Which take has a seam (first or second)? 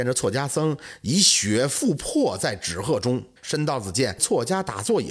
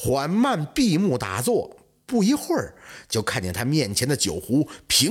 first